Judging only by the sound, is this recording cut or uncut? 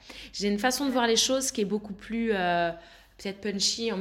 uncut